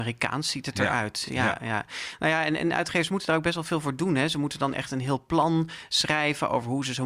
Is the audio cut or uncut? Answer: uncut